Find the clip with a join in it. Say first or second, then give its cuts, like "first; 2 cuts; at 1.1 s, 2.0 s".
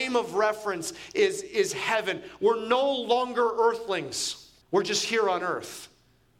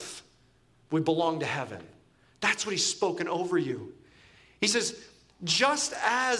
first; 1 cut; at 4.6 s